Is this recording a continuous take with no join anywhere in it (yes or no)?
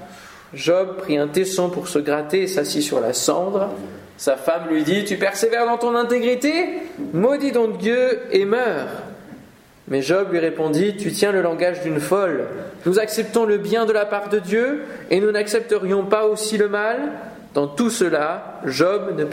yes